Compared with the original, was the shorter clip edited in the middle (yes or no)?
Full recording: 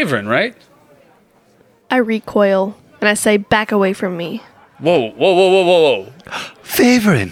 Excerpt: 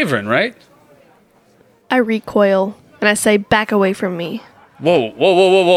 no